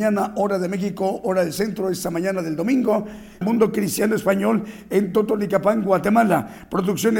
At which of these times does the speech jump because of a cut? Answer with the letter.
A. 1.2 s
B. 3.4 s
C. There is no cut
B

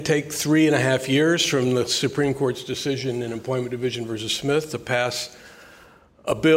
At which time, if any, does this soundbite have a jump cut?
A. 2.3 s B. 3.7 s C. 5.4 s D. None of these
D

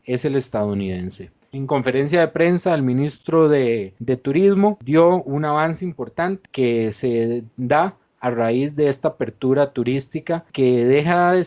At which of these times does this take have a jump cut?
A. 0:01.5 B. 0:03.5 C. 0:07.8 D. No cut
A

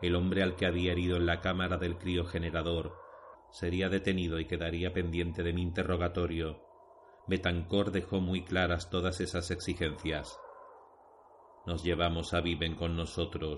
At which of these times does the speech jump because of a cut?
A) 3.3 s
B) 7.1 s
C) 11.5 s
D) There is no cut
A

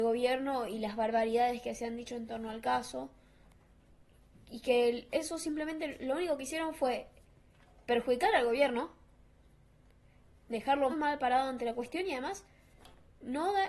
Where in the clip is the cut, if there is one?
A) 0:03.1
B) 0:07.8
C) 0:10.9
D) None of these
C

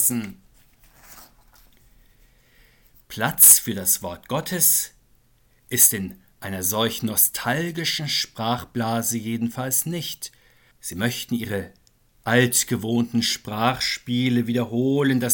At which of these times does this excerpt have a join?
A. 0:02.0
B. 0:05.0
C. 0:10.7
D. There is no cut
C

